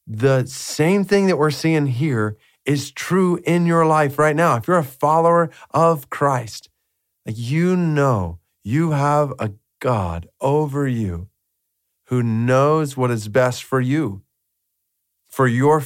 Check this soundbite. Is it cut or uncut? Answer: uncut